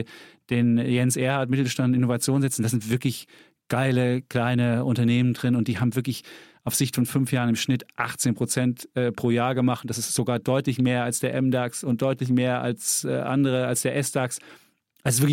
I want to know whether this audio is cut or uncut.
uncut